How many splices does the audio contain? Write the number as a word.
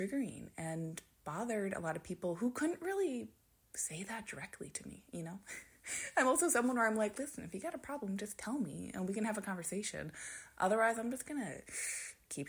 zero